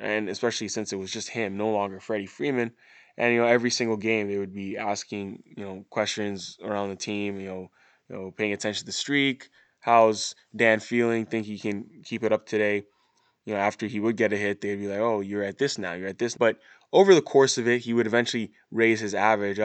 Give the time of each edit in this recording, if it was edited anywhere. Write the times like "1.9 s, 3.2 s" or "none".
16.4 s